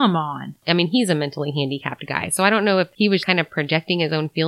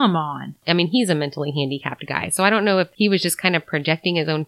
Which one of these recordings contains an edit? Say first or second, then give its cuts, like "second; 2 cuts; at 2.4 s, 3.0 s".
first; 1 cut; at 3.2 s